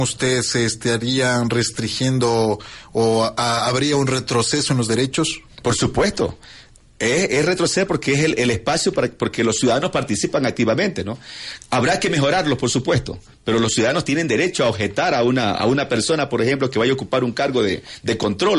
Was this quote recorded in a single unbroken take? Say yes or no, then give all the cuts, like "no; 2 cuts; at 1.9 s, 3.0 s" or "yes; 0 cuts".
yes; 0 cuts